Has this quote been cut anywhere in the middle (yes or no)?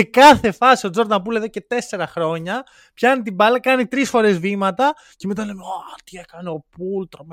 no